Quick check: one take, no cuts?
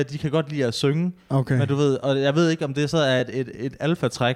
yes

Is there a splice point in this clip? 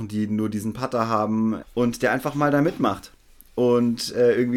yes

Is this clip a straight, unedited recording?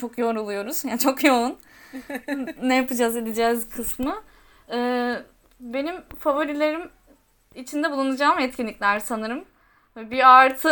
yes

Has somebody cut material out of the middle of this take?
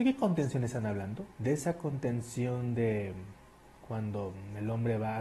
yes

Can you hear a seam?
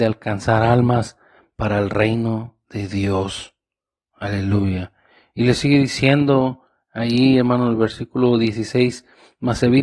no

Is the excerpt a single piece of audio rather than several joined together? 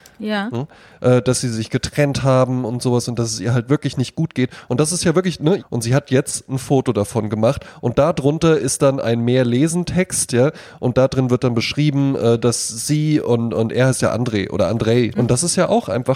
no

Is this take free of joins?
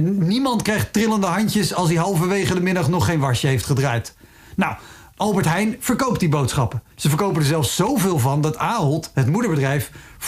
no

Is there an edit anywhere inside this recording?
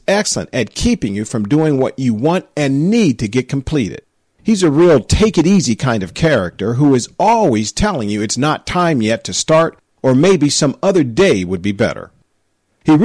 no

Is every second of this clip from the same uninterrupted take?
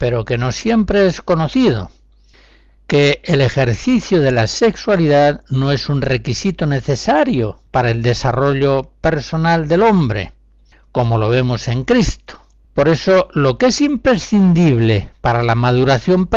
no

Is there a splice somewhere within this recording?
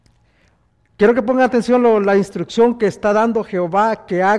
no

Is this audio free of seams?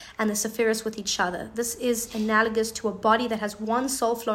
yes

